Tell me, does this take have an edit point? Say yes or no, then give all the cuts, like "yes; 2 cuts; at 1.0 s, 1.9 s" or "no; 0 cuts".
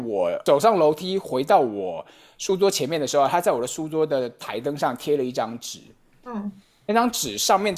no; 0 cuts